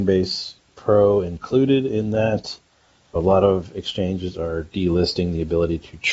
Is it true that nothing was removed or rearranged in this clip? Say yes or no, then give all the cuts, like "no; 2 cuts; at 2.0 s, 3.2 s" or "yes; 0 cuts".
no; 1 cut; at 3.2 s